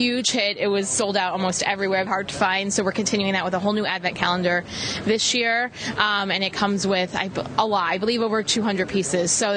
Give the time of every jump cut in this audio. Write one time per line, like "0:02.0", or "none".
0:02.1